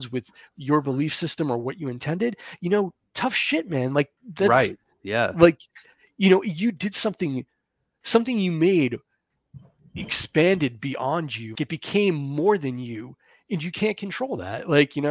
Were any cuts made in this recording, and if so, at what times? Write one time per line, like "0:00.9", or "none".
0:11.6